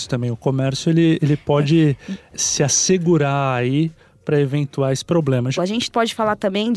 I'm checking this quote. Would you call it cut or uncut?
cut